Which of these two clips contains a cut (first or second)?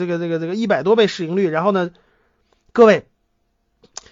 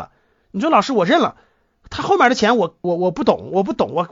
second